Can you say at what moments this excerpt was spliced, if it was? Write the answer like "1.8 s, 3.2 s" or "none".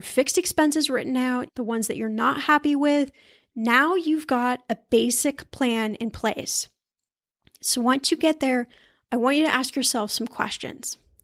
1.5 s